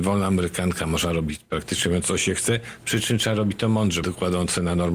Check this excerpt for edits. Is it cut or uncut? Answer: cut